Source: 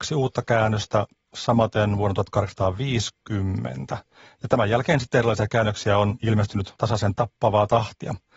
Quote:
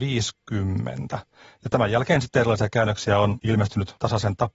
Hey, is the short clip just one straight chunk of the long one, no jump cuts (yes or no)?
yes